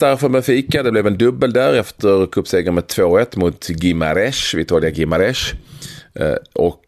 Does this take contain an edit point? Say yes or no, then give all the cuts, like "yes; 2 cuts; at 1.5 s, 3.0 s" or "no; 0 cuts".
no; 0 cuts